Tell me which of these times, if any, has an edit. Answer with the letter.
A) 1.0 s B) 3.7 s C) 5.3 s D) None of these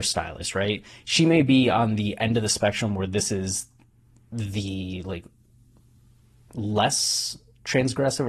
D